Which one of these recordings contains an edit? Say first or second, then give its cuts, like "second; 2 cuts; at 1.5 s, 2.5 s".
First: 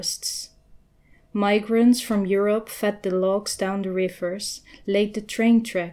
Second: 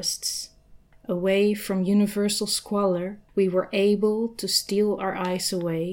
second; 2 cuts; at 0.9 s, 3.3 s